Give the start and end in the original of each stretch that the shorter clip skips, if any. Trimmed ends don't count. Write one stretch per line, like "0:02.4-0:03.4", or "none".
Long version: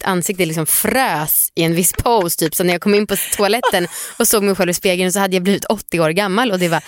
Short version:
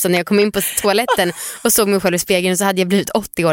none